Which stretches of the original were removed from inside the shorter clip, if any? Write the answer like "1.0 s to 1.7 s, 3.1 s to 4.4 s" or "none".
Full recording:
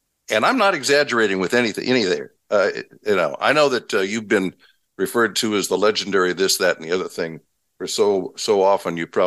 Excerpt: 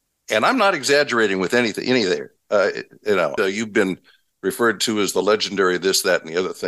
3.4 s to 3.9 s